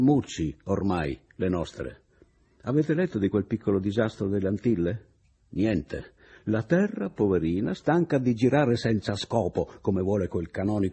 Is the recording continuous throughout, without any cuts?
yes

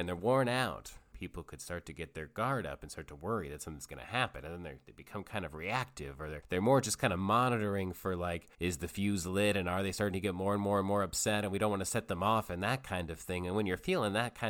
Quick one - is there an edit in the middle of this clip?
yes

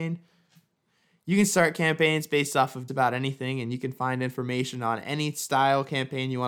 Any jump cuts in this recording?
yes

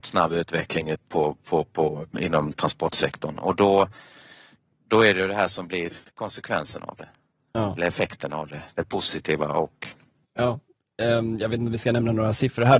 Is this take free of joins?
no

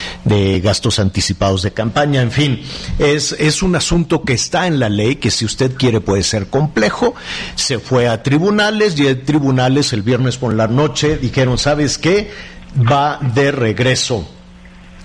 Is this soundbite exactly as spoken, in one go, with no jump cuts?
yes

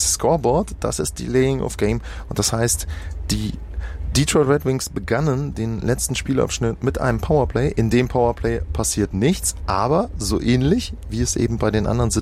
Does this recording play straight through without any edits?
yes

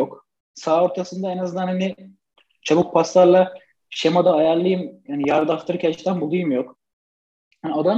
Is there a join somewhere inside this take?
no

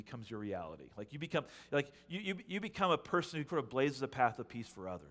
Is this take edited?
yes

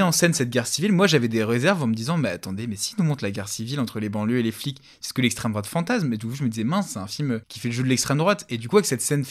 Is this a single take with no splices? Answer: yes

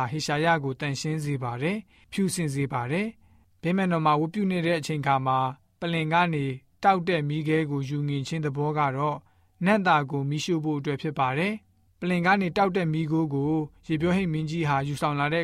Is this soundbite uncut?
yes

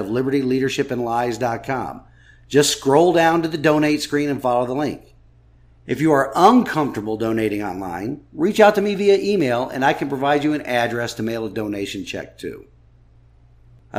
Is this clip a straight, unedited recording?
yes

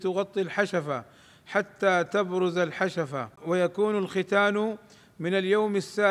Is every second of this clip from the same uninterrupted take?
no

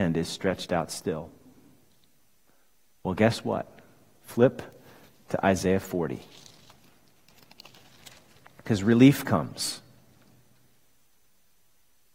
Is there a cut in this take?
no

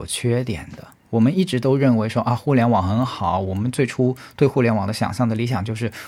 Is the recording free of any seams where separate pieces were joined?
yes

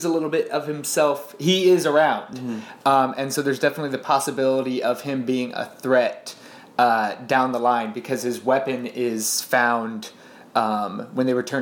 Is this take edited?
no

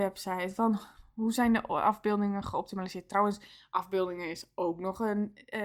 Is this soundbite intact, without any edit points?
yes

